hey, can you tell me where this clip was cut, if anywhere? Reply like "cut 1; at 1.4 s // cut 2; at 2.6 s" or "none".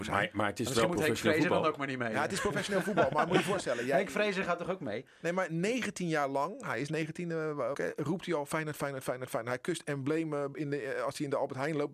cut 1; at 7.7 s

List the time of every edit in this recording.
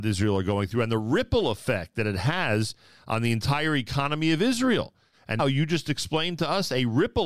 cut 1; at 5.4 s

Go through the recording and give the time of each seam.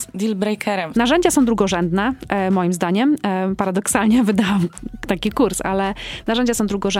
cut 1; at 0.9 s

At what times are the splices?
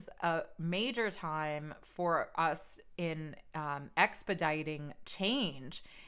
none

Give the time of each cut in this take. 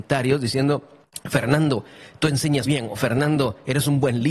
cut 1; at 2.7 s

